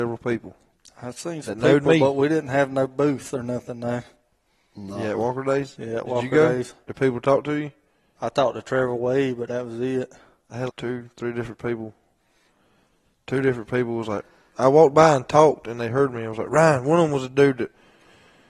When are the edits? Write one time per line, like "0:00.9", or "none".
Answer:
0:06.8
0:10.7

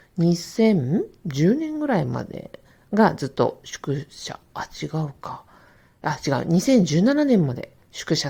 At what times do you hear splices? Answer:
none

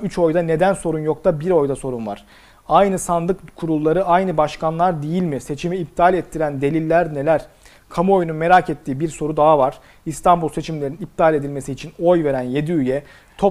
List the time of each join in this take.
none

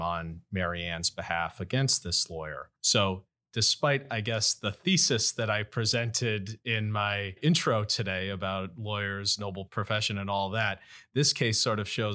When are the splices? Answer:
none

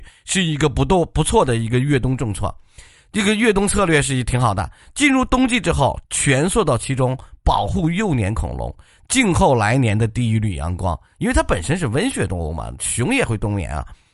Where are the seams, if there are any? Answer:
0:06.0

